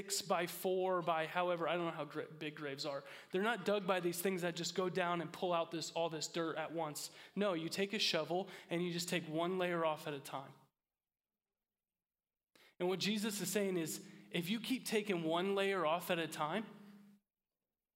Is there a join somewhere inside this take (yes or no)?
no